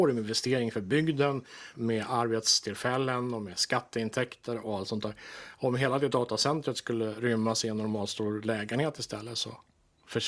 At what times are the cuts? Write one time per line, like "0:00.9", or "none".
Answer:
0:01.7